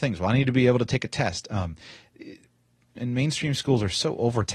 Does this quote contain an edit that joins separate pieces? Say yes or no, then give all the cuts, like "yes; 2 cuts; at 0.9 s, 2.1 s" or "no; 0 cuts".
yes; 1 cut; at 3.0 s